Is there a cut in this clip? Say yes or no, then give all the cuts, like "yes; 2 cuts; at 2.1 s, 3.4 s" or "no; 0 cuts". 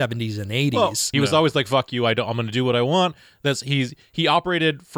yes; 1 cut; at 1.1 s